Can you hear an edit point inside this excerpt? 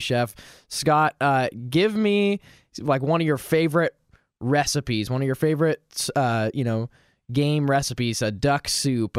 no; 0 cuts

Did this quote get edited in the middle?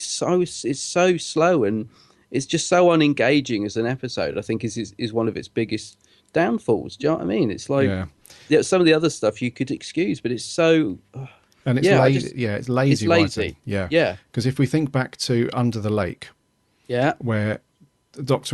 no; 0 cuts

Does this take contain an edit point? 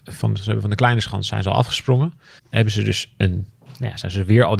yes; 1 cut; at 2.4 s

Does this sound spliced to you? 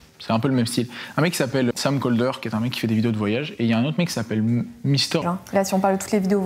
yes; 2 cuts; at 1.7 s, 5.2 s

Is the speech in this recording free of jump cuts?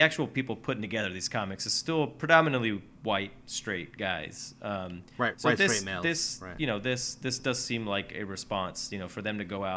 yes; 0 cuts

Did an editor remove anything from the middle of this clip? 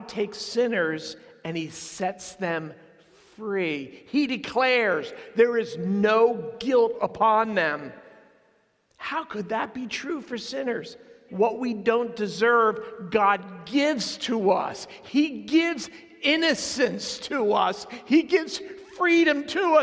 yes; 1 cut; at 11.3 s

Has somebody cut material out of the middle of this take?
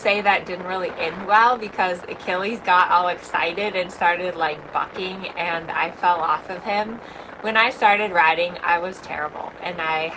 no; 0 cuts

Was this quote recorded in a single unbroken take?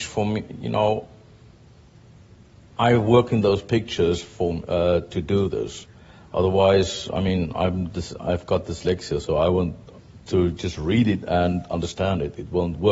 yes; 0 cuts

